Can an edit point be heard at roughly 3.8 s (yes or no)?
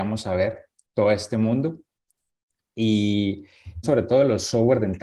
yes